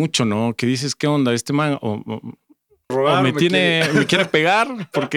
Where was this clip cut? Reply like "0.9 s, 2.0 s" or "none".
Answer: 2.9 s